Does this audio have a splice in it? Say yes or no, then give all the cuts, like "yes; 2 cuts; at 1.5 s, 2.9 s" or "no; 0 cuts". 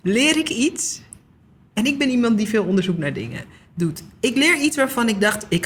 no; 0 cuts